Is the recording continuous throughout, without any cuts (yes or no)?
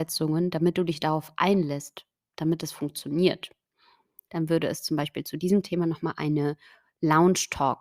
no